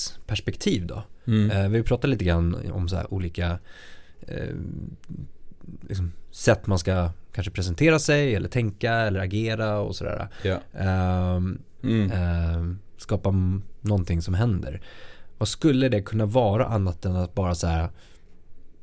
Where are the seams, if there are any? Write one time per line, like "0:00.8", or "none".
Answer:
0:11.8